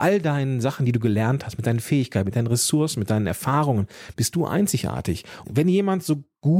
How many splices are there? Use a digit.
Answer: 2